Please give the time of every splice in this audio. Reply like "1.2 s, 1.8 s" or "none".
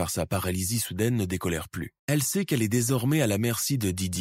2.0 s